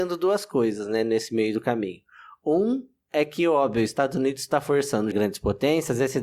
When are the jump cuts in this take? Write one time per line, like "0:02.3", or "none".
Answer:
0:05.1